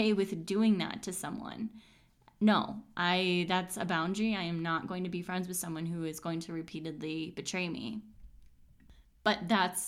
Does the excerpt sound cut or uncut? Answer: uncut